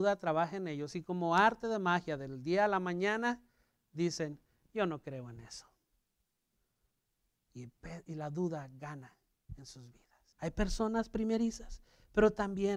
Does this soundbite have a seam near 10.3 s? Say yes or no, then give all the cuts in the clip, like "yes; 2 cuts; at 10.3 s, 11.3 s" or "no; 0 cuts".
yes; 1 cut; at 10.3 s